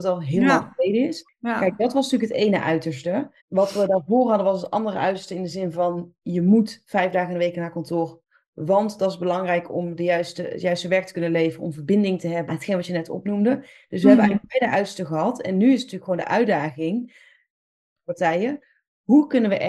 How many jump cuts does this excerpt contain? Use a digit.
3